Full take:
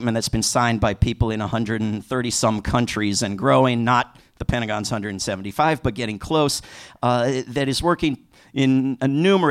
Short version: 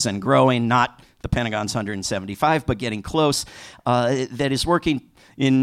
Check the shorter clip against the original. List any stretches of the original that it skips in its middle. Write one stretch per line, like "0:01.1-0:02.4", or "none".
none